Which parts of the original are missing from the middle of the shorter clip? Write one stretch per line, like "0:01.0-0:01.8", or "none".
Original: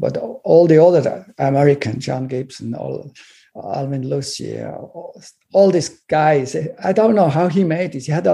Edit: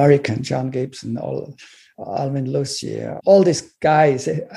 0:04.7-0:05.4

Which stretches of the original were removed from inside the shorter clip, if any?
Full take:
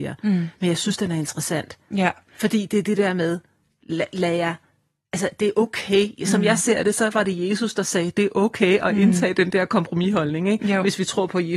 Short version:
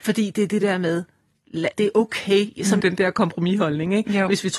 0:04.1-0:05.3
0:06.4-0:09.3

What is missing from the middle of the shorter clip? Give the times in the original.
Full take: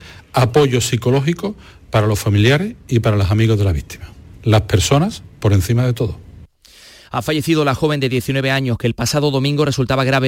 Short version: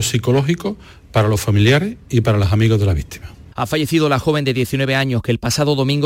0:04.3-0:07.1

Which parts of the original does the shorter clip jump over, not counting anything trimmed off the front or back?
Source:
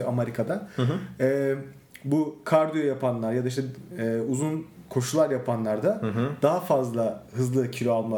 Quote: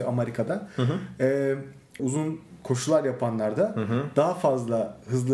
0:02.0-0:04.3

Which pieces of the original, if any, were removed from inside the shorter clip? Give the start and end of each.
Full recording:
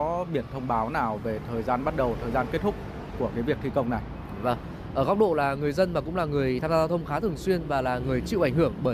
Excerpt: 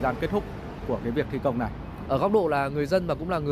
0:04.4-0:04.9

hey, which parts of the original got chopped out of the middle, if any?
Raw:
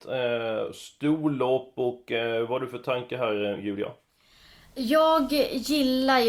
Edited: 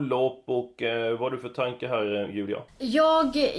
0:04.0-0:04.6

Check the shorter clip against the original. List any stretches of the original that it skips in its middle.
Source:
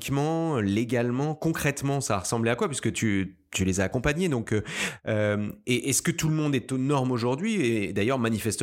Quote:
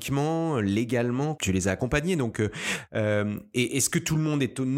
0:01.4-0:03.5

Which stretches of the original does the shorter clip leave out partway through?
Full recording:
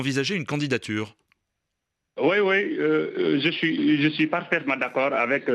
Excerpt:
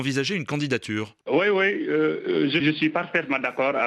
0:01.2-0:02.1
0:03.5-0:04.0

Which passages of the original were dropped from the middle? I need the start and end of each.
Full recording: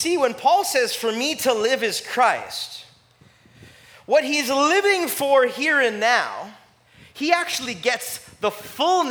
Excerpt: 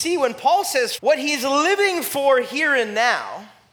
0:01.0-0:04.0

